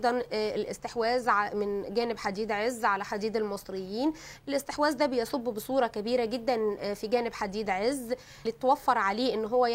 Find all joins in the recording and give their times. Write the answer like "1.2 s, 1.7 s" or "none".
8.5 s